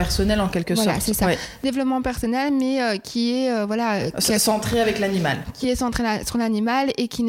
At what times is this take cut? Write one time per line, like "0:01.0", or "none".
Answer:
none